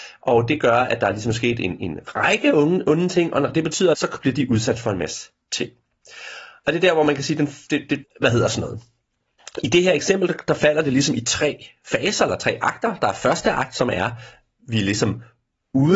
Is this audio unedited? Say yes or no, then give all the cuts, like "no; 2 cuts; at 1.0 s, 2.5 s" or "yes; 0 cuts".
no; 2 cuts; at 3.9 s, 8.0 s